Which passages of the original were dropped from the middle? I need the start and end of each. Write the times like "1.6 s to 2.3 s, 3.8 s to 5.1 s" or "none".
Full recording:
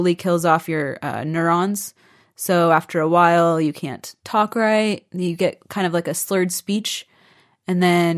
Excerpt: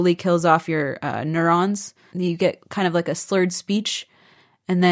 2.1 s to 5.1 s